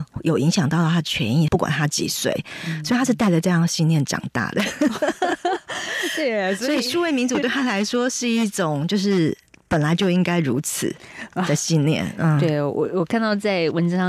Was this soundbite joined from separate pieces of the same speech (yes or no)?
yes